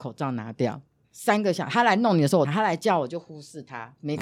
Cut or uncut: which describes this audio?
cut